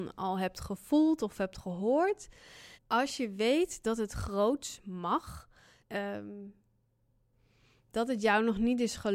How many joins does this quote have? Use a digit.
2